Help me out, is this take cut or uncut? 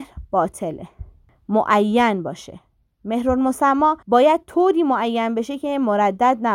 cut